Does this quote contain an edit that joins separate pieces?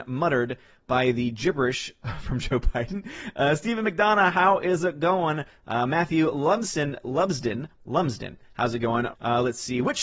yes; 1 cut; at 9.1 s

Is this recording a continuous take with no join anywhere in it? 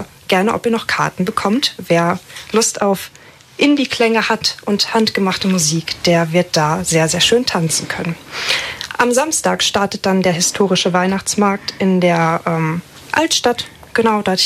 yes; 0 cuts

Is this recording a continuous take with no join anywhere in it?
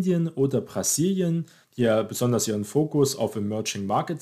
no; 1 cut; at 1.6 s

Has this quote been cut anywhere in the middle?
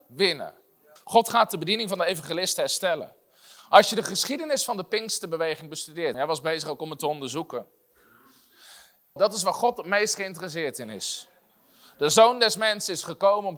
yes; 3 cuts; at 1.0 s, 6.1 s, 9.2 s

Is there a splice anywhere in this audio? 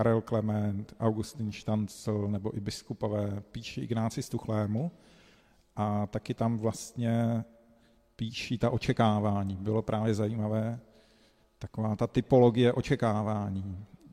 no; 0 cuts

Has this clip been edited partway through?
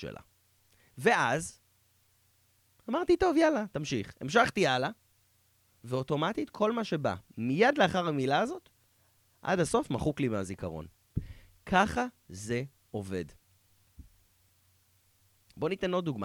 no; 0 cuts

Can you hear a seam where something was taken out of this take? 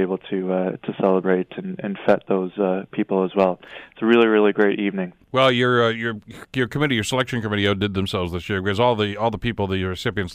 no; 0 cuts

